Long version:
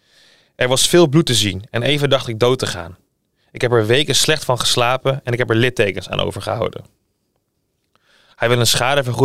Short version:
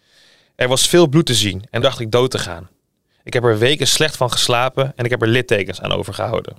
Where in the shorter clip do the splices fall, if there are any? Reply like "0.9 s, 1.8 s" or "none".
1.8 s